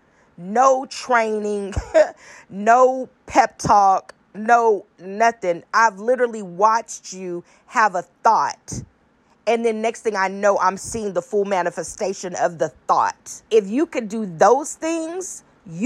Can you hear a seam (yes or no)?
yes